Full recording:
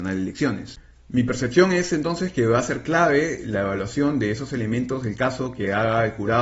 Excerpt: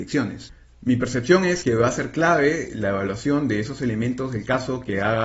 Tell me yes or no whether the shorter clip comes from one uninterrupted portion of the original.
no